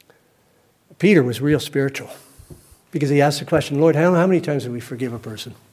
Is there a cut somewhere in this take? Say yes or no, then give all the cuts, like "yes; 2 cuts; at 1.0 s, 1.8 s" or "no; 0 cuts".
no; 0 cuts